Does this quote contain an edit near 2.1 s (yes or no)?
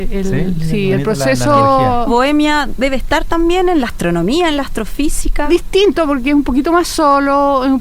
yes